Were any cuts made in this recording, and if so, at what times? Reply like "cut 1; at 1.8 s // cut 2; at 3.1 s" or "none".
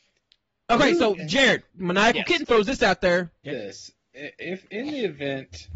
cut 1; at 1.7 s // cut 2; at 3.4 s